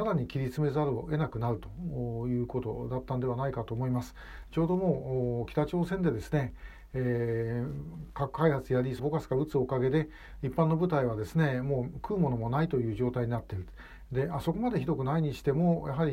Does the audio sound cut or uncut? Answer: cut